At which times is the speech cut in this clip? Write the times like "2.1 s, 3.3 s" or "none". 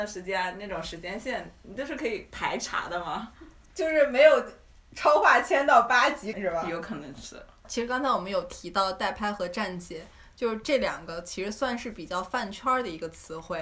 6.3 s

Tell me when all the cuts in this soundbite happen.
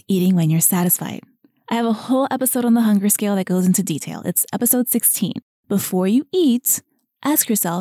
5.6 s

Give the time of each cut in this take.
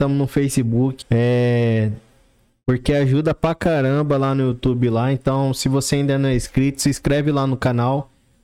1.0 s

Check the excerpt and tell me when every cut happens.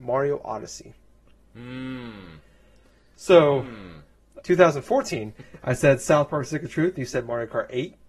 4.4 s

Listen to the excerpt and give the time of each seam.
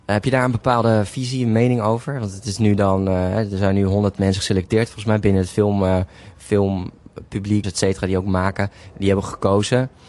7.6 s

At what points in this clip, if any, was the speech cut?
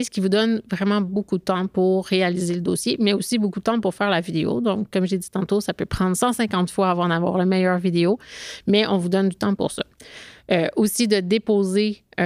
10.4 s

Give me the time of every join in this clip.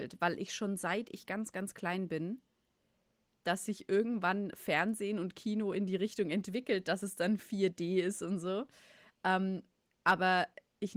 3.4 s

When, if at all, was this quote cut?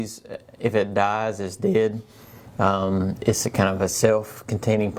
none

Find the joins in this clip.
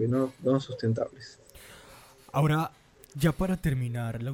none

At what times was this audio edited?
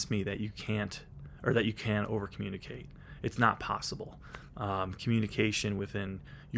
none

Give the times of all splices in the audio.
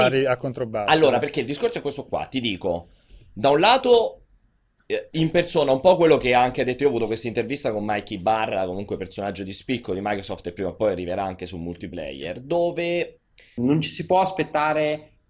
13.6 s

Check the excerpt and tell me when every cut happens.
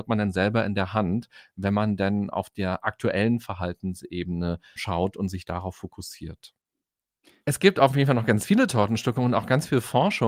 4.8 s, 7.4 s

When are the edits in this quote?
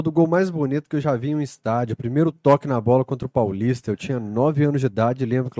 none

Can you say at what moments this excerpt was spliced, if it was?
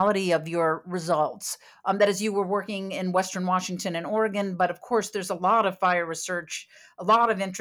none

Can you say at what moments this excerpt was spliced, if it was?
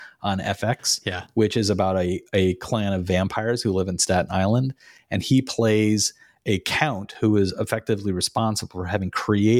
none

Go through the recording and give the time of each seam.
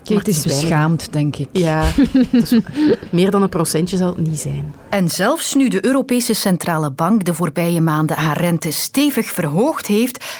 none

